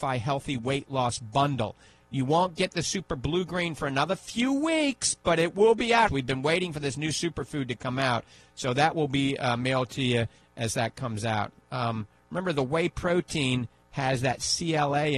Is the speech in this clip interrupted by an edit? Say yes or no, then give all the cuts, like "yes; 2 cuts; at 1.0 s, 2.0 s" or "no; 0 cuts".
yes; 1 cut; at 6.1 s